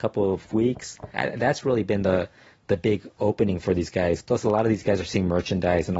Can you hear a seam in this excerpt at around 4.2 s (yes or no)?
no